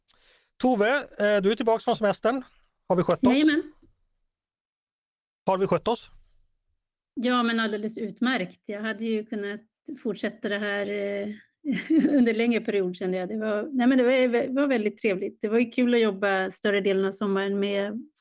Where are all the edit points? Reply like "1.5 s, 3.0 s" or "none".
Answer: none